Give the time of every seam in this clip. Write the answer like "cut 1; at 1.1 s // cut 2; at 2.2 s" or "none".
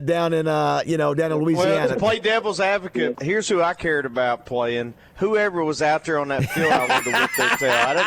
cut 1; at 3.1 s